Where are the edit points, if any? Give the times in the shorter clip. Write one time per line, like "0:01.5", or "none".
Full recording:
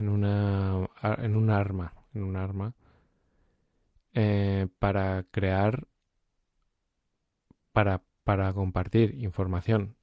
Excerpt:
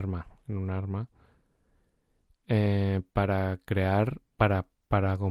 0:04.3